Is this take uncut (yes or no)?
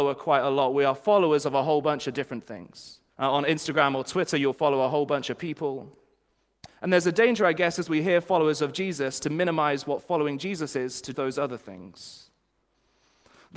no